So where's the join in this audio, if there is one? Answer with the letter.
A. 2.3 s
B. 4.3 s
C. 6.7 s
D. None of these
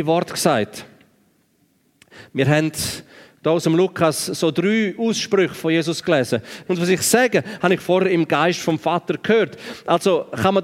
C